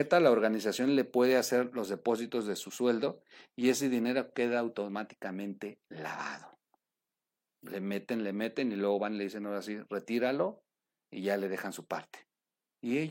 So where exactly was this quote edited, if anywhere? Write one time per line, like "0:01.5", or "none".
none